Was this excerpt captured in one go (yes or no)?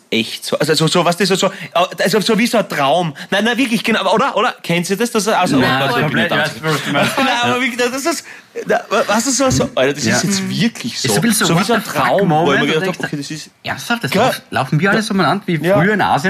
yes